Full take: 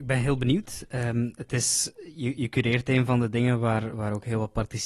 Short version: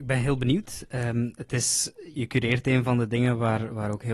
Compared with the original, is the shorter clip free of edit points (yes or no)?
no